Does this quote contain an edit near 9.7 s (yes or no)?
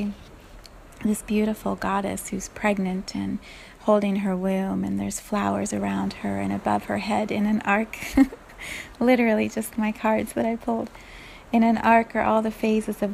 yes